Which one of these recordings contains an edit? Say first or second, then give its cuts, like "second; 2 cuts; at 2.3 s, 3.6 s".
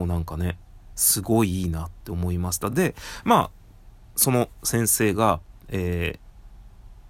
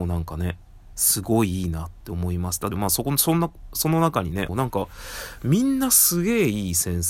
second; 2 cuts; at 2.7 s, 4.5 s